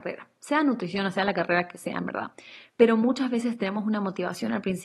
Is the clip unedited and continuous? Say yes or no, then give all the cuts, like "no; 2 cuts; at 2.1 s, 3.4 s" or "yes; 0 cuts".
yes; 0 cuts